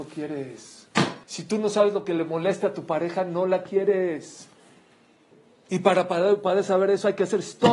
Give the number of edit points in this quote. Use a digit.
1